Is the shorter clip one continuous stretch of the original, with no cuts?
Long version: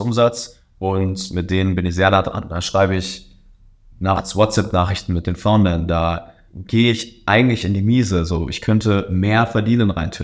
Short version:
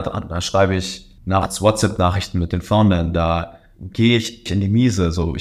no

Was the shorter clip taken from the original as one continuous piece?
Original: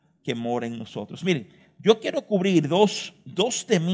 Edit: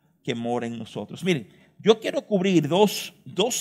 yes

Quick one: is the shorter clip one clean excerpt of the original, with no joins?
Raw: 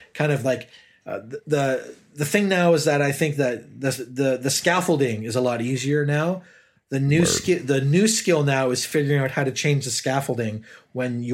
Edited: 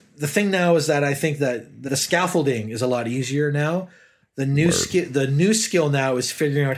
no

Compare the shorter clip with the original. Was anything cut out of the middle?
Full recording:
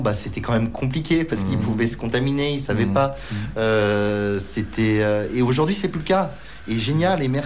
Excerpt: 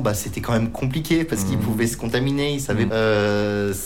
yes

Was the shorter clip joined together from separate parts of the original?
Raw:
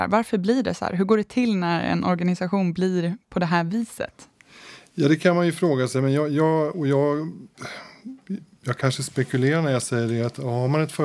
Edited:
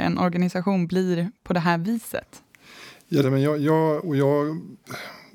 yes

